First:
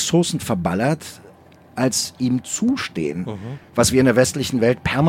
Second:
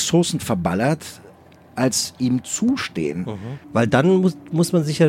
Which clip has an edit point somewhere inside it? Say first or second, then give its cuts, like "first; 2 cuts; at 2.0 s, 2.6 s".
second; 1 cut; at 3.6 s